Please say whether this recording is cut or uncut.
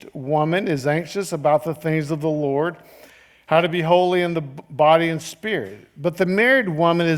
uncut